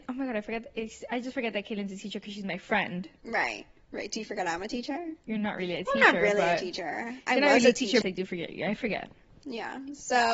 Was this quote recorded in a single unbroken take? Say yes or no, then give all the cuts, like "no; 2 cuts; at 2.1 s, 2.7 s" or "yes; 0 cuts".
no; 1 cut; at 8.0 s